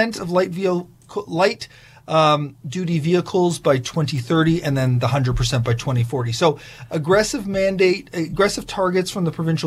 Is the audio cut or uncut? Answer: uncut